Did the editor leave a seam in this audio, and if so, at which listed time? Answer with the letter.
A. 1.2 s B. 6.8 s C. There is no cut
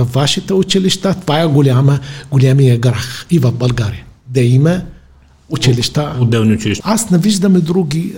B